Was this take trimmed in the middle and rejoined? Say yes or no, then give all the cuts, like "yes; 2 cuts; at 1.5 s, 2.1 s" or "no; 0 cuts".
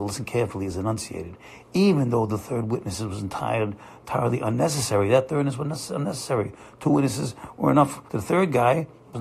yes; 1 cut; at 8.1 s